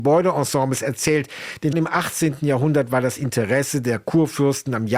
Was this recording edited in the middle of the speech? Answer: yes; 1 cut; at 1.7 s

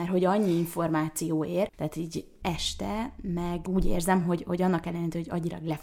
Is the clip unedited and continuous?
yes; 0 cuts

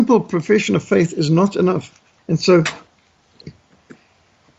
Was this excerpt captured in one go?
no; 1 cut; at 2.2 s

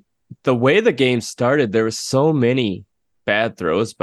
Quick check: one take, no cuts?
yes; 0 cuts

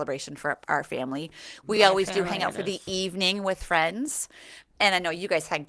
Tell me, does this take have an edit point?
no; 0 cuts

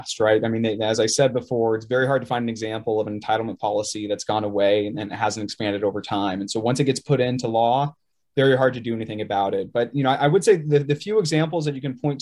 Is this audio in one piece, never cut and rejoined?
yes; 0 cuts

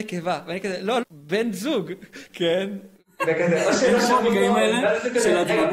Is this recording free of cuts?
no; 2 cuts; at 1.0 s, 2.3 s

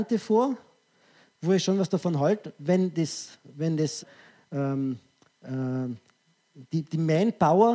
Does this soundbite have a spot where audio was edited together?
yes; 1 cut; at 4.0 s

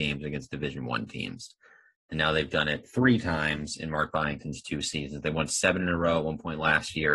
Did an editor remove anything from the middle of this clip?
no; 0 cuts

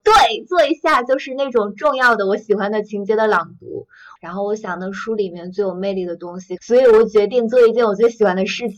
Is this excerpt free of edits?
no; 2 cuts; at 4.2 s, 6.6 s

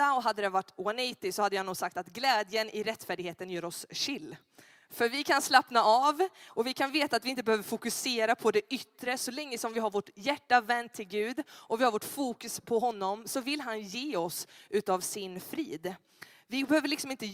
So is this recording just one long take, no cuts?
yes; 0 cuts

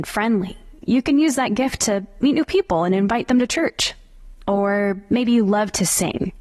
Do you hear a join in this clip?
no; 0 cuts

